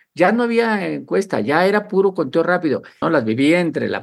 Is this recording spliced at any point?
yes; 1 cut; at 3.0 s

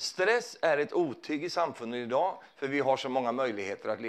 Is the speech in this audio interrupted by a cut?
yes; 1 cut; at 2.5 s

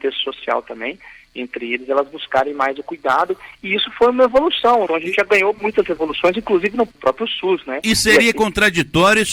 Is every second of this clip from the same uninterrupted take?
no; 1 cut; at 4.9 s

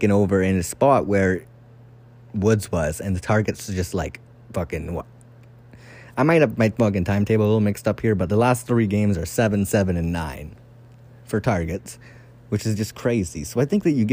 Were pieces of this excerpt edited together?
no; 0 cuts

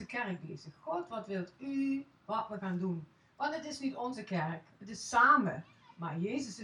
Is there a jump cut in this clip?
no; 0 cuts

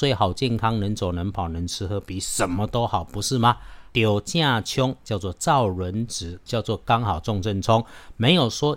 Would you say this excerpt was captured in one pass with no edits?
no; 2 cuts; at 3.9 s, 6.5 s

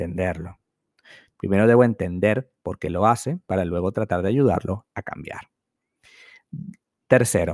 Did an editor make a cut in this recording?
yes; 1 cut; at 1.3 s

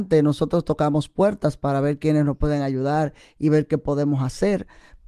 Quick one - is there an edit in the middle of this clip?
no; 0 cuts

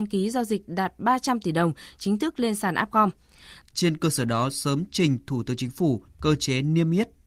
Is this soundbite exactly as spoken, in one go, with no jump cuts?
no; 1 cut; at 3.6 s

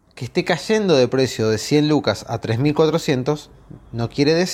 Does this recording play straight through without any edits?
yes; 0 cuts

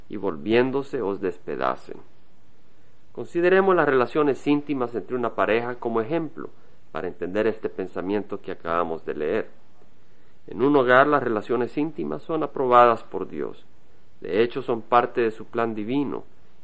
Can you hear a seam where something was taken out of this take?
no; 0 cuts

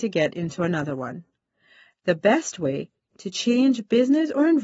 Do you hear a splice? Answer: yes; 1 cut; at 3.1 s

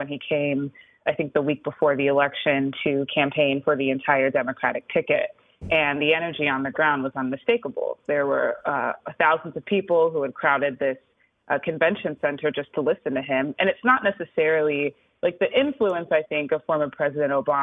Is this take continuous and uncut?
yes; 0 cuts

